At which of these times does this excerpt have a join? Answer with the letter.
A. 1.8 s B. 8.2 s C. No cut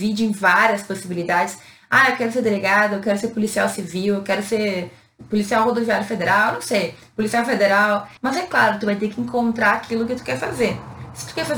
B